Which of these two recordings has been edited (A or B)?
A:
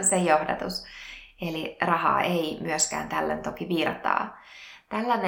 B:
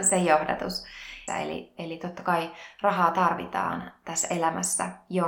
B